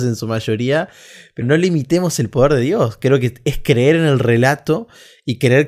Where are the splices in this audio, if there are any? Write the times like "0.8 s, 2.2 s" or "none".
1.4 s